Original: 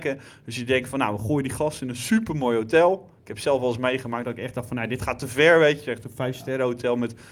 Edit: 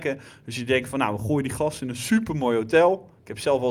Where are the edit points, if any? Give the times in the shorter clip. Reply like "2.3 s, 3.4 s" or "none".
none